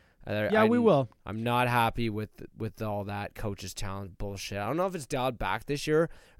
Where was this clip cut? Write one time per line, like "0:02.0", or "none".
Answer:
none